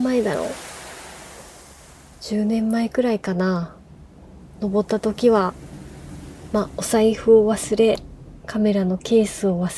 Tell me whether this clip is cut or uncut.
uncut